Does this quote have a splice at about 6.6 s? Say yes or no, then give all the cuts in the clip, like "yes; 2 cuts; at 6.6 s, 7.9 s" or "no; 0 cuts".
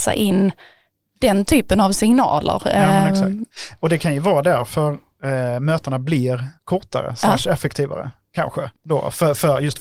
yes; 2 cuts; at 6.6 s, 8.7 s